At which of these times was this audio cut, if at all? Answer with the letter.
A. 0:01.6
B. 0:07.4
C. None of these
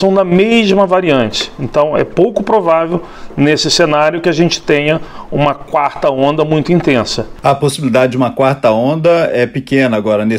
B